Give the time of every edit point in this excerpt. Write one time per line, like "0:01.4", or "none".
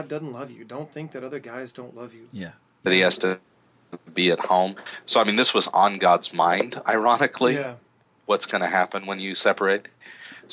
0:02.9